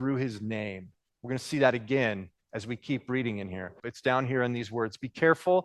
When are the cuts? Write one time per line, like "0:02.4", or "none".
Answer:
0:03.8